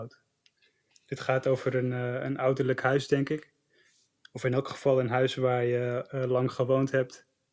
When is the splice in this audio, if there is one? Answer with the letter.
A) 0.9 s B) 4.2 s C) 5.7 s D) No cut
A